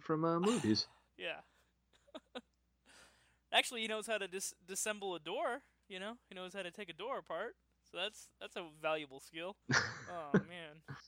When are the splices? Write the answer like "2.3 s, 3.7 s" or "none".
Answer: 9.6 s